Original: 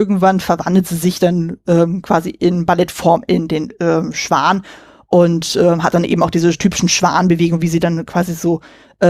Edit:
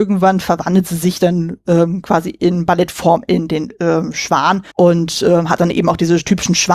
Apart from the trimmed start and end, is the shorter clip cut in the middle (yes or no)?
yes